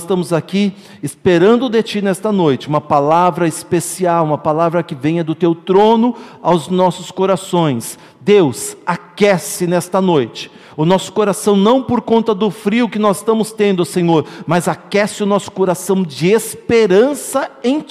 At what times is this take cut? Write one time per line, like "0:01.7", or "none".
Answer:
none